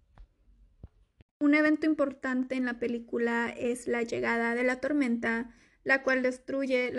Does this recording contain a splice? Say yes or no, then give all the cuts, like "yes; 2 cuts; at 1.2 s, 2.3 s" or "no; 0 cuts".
yes; 1 cut; at 1.3 s